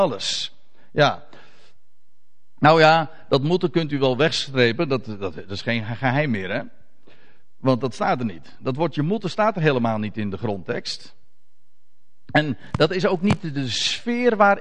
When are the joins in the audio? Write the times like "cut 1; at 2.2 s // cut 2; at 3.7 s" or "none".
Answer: none